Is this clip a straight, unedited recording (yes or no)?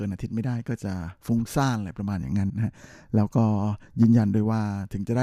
no